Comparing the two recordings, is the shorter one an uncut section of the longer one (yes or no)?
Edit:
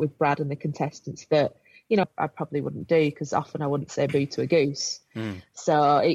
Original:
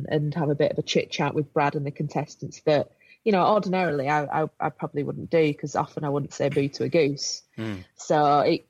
no